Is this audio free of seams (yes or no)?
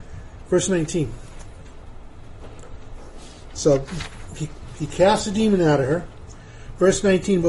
yes